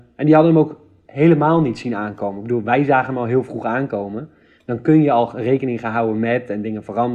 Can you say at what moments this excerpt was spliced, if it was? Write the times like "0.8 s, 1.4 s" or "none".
none